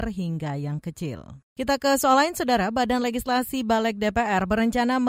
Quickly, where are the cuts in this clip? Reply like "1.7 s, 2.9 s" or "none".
1.5 s